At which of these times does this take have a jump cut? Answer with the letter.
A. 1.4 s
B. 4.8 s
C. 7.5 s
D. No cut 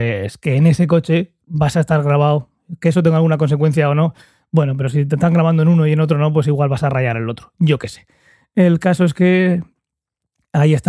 A